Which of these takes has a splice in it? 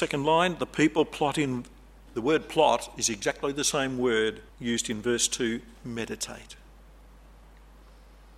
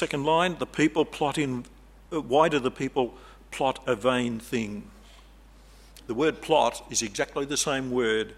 first; 2 cuts; at 2.1 s, 4.5 s

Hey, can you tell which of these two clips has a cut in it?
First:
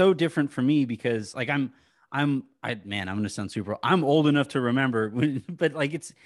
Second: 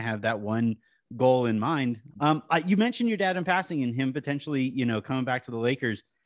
second; 1 cut; at 2.1 s

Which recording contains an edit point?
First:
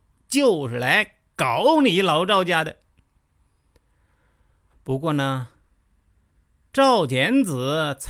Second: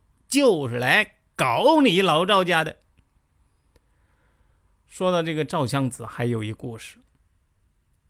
first; 1 cut; at 4.7 s

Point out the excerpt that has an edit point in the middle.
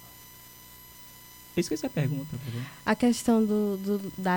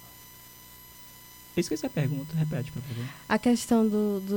first; 1 cut; at 2.3 s

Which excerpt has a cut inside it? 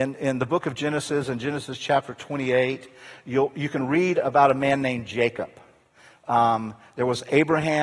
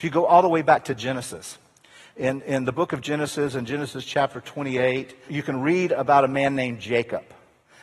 second; 1 cut; at 5.3 s

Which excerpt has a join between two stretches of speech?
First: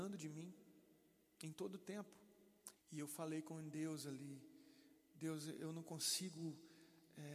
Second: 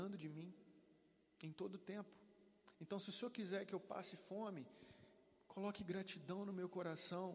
first; 1 cut; at 2.8 s

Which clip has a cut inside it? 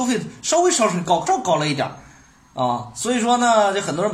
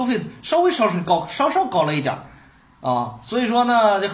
first; 1 cut; at 1.3 s

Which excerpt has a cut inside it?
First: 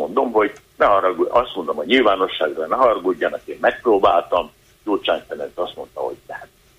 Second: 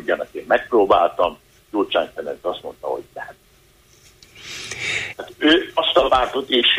second; 1 cut; at 5.1 s

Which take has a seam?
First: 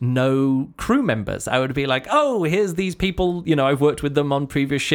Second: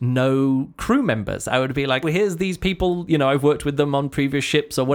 second; 1 cut; at 2.0 s

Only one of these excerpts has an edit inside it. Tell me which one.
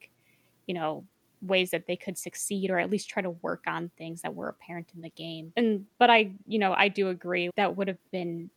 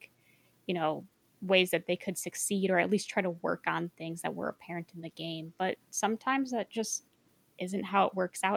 first; 2 cuts; at 5.5 s, 7.5 s

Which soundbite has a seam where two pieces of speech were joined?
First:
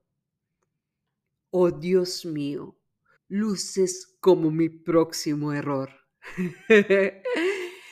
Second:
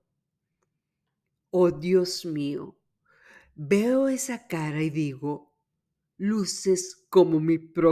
first; 1 cut; at 3.2 s

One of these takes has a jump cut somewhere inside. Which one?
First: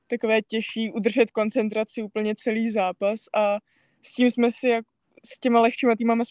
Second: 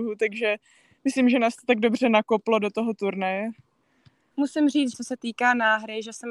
second; 1 cut; at 4.9 s

